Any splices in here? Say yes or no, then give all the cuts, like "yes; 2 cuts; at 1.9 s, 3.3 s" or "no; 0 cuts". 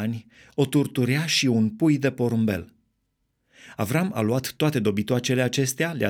no; 0 cuts